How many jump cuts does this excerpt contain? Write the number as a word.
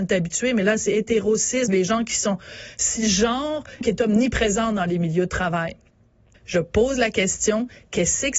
three